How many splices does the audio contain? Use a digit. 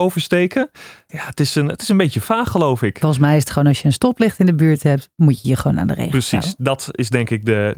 1